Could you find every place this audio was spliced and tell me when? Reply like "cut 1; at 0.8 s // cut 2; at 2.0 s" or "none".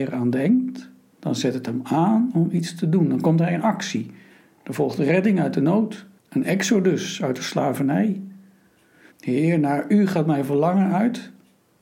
cut 1; at 6.2 s // cut 2; at 9.1 s